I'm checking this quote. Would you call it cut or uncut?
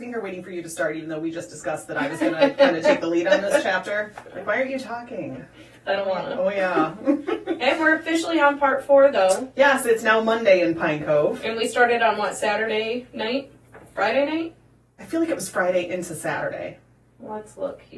cut